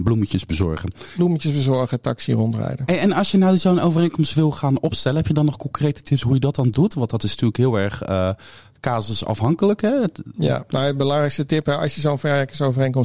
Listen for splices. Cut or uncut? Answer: uncut